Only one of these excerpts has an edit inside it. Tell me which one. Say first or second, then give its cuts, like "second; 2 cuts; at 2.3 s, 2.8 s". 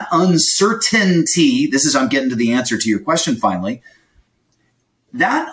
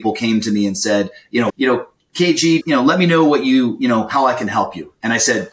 second; 2 cuts; at 1.5 s, 2.6 s